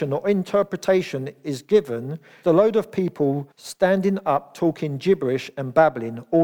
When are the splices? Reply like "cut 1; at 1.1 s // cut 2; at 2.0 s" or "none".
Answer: cut 1; at 2.4 s // cut 2; at 3.5 s